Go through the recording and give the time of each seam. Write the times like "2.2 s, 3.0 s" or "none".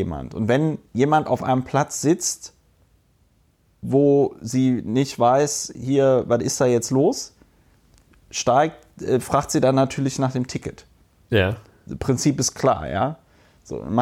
none